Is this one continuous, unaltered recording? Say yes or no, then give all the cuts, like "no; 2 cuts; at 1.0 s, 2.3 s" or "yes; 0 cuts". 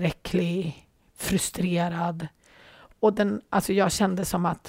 yes; 0 cuts